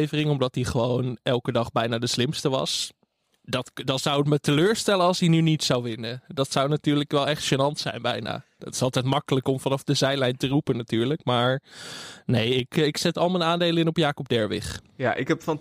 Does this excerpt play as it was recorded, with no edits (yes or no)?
yes